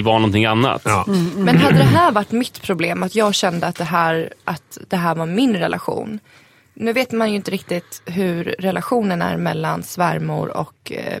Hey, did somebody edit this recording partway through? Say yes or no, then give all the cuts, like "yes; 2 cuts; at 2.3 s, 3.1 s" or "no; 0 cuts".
no; 0 cuts